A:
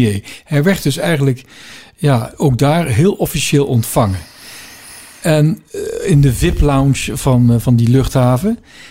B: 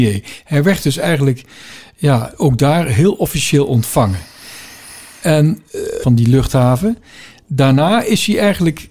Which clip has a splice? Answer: B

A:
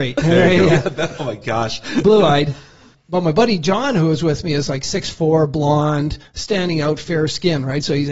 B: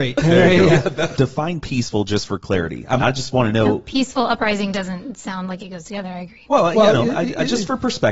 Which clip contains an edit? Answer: B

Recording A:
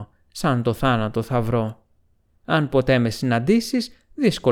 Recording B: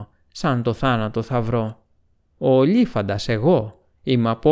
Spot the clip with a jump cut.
A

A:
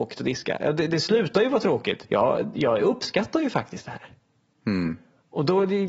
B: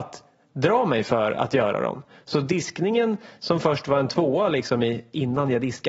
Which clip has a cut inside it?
A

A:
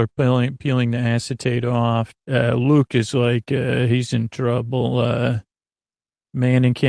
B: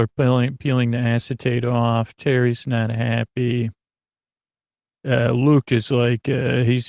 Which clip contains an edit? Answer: A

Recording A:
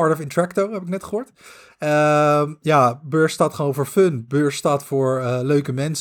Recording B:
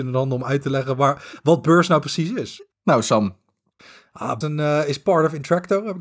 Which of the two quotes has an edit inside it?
B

